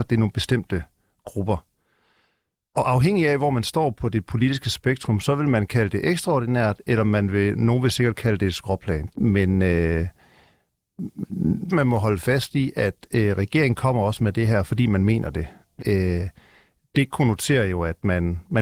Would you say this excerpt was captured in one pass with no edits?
no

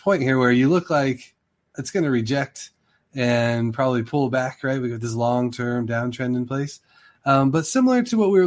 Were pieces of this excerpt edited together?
no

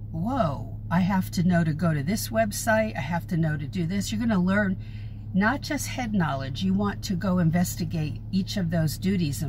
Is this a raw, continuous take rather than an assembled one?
yes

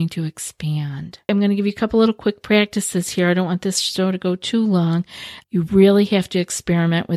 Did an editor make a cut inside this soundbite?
yes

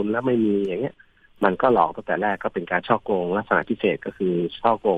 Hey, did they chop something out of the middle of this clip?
no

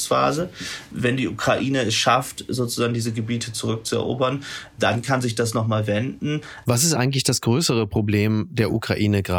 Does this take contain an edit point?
yes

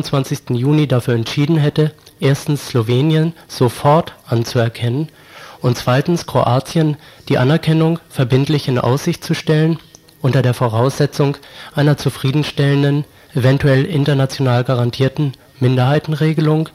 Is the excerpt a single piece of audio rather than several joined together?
yes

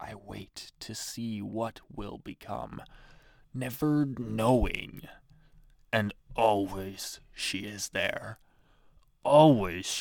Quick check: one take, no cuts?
yes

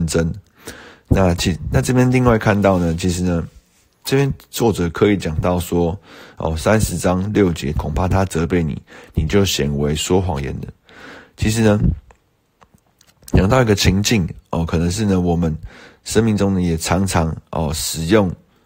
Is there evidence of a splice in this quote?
yes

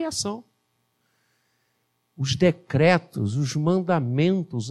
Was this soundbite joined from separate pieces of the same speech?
no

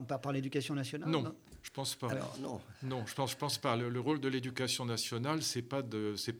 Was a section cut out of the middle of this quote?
no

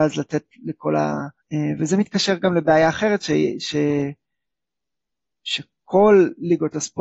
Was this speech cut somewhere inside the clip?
yes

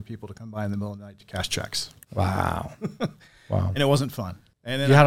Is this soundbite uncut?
yes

